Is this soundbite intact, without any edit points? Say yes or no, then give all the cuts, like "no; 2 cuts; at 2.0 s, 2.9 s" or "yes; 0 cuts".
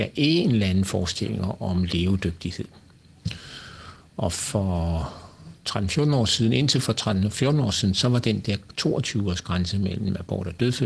yes; 0 cuts